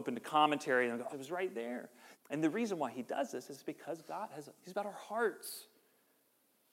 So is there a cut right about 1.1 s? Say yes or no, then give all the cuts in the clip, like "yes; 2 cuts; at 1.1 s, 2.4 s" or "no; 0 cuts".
yes; 3 cuts; at 1.1 s, 2.1 s, 4.6 s